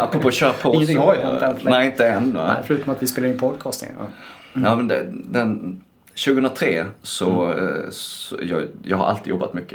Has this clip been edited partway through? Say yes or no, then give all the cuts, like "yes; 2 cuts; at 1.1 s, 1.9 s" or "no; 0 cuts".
no; 0 cuts